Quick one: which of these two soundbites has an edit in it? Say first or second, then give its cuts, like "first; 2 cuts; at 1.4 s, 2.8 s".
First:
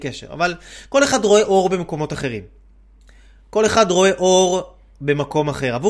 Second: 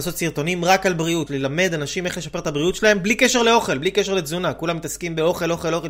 second; 1 cut; at 1.3 s